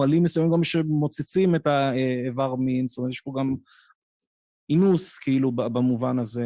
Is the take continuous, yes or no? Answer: yes